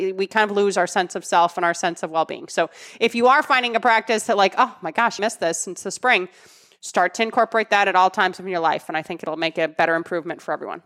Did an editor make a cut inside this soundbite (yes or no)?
yes